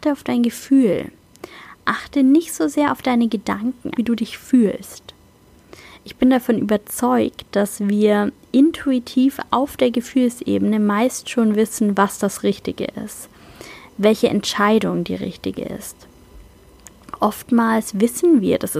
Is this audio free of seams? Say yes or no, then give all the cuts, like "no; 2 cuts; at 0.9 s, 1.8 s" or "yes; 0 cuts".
no; 1 cut; at 4.0 s